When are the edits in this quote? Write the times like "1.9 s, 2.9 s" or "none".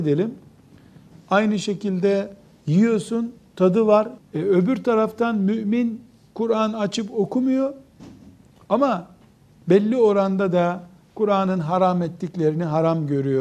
1.1 s, 4.2 s